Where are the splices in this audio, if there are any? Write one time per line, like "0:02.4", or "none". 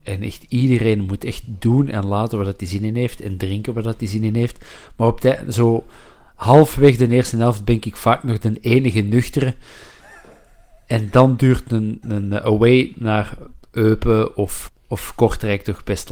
0:12.0
0:14.7